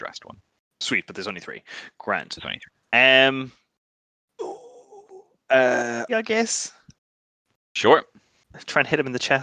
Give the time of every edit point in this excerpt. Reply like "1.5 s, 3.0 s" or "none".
6.1 s